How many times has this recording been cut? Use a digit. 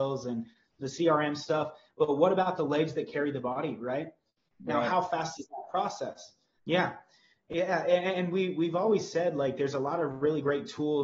2